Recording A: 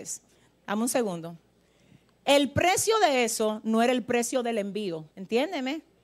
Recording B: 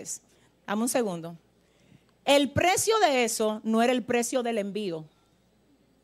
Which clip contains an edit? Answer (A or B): A